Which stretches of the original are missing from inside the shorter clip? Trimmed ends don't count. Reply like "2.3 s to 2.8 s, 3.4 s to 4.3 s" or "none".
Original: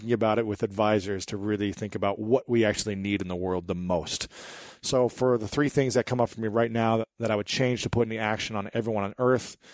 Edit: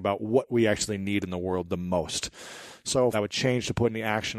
5.1 s to 7.3 s